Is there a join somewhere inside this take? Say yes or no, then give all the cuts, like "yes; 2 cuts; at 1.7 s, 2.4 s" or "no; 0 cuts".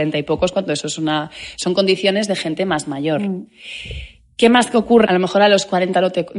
yes; 1 cut; at 5.1 s